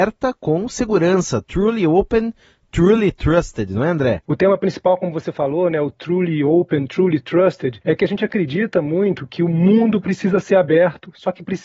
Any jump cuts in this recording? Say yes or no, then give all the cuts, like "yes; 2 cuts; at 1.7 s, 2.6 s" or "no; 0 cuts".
no; 0 cuts